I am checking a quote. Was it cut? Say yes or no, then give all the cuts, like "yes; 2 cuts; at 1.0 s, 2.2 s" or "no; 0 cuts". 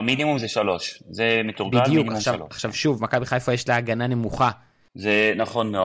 yes; 1 cut; at 4.9 s